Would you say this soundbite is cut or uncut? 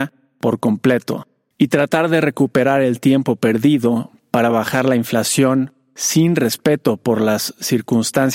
cut